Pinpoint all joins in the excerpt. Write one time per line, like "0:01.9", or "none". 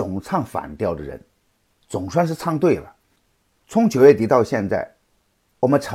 0:01.7